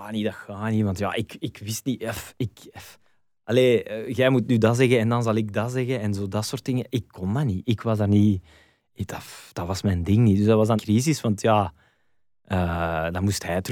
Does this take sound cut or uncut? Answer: cut